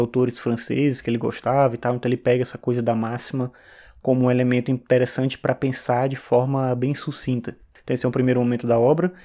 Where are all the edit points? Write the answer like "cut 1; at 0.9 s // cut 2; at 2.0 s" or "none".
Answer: cut 1; at 7.8 s

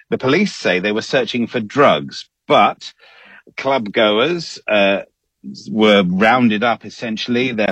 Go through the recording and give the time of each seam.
none

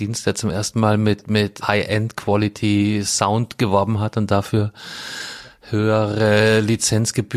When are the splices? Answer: cut 1; at 1.6 s

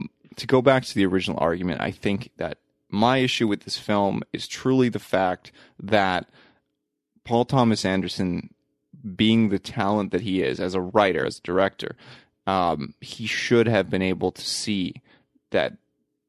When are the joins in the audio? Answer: cut 1; at 11.2 s

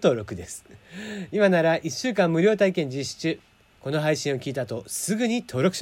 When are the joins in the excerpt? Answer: none

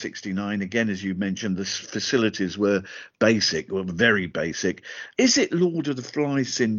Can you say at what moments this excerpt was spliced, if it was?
cut 1; at 5.1 s

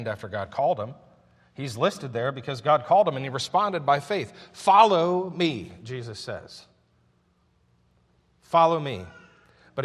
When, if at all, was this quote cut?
none

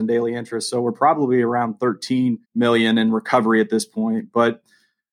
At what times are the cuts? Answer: cut 1; at 2.4 s

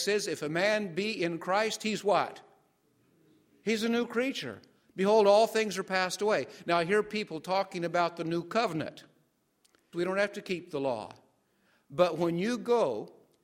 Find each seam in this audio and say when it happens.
cut 1; at 9.9 s

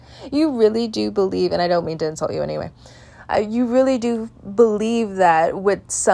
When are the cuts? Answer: none

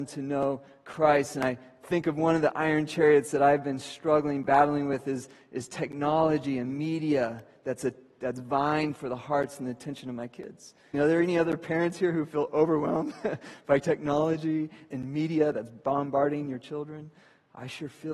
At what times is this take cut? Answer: cut 1; at 10.9 s

